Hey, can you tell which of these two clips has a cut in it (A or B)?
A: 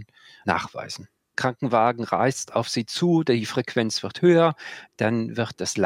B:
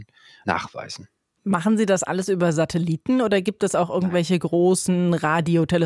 A